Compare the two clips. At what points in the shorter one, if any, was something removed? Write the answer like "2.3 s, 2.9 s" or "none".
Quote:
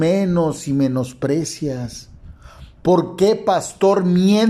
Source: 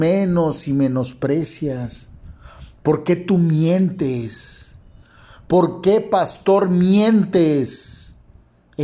2.8 s